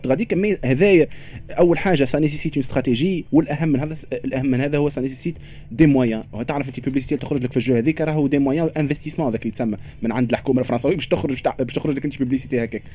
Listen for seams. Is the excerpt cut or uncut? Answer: uncut